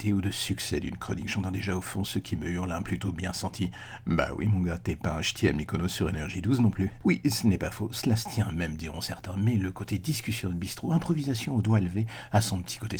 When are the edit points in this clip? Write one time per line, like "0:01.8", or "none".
none